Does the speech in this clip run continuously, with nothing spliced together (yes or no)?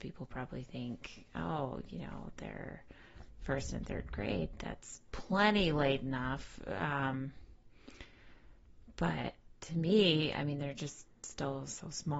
yes